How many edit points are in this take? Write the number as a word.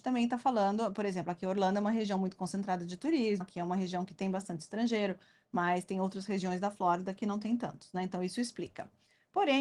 one